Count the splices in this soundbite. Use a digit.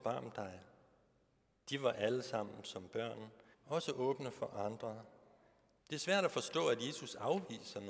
2